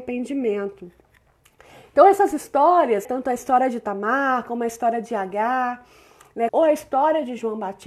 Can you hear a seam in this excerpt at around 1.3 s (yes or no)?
no